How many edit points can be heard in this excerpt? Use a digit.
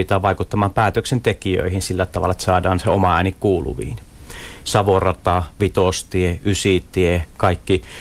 1